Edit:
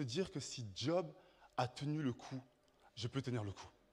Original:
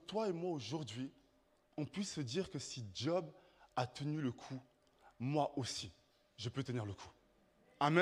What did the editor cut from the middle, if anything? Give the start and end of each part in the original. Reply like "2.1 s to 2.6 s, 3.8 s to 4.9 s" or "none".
5.0 s to 6.3 s